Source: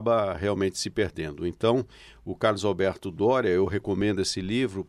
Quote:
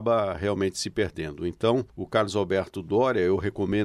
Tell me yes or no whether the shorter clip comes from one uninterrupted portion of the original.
no